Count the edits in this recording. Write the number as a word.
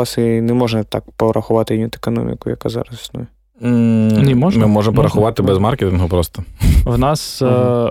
one